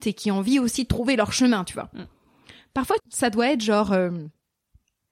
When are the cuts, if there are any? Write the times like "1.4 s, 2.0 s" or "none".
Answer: 3.0 s